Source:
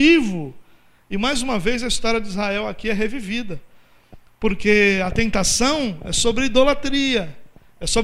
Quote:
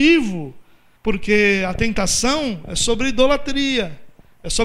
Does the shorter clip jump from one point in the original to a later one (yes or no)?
yes